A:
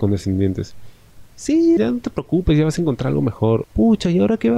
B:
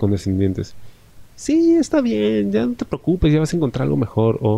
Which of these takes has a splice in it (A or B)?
A